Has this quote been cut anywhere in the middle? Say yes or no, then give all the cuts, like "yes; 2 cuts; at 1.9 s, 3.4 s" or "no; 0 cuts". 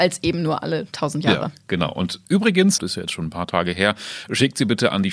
yes; 1 cut; at 2.8 s